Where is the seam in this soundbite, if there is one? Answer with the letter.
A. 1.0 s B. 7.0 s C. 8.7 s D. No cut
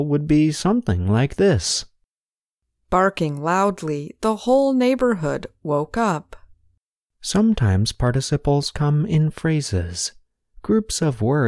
B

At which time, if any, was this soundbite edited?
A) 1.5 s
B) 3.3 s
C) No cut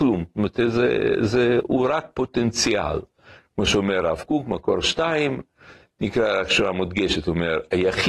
C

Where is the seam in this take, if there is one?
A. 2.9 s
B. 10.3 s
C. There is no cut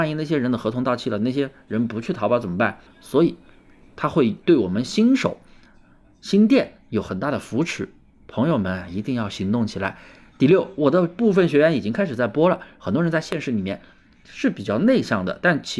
A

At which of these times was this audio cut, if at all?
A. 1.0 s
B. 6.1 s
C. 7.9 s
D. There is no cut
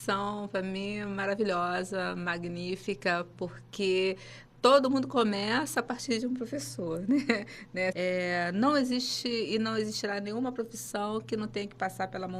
C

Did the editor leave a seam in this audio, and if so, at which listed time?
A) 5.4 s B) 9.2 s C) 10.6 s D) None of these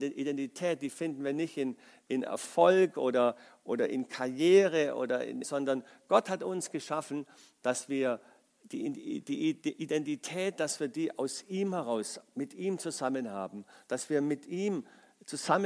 A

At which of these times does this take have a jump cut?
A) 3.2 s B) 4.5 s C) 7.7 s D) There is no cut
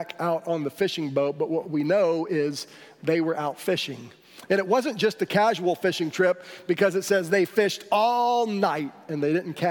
D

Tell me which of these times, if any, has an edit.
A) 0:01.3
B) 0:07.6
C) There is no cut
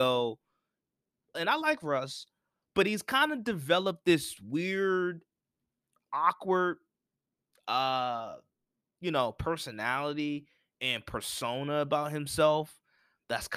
A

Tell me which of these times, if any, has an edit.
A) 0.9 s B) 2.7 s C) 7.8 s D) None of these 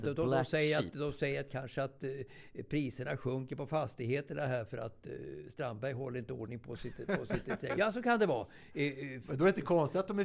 C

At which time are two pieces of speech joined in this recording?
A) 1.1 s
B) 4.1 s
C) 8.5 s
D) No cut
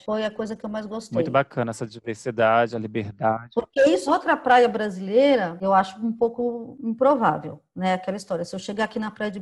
B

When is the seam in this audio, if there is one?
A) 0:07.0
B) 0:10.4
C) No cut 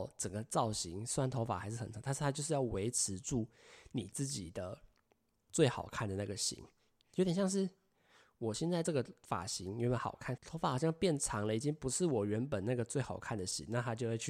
B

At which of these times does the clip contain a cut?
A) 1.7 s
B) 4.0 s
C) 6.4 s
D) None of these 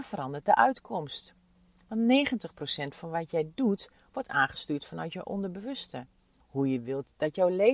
C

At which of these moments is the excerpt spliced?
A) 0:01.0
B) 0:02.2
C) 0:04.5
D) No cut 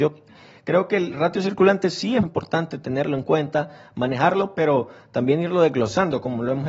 B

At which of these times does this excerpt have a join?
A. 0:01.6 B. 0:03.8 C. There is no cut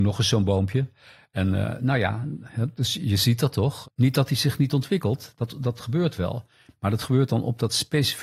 B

